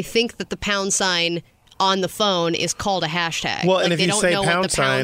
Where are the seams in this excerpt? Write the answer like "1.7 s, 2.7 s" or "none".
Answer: none